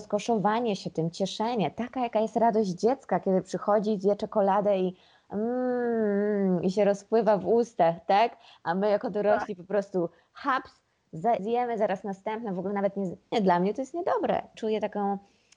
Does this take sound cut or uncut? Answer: cut